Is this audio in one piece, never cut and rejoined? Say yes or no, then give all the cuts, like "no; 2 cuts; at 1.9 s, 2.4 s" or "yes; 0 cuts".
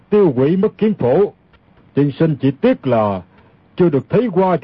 no; 1 cut; at 1.8 s